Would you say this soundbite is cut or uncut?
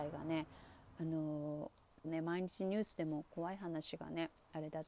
cut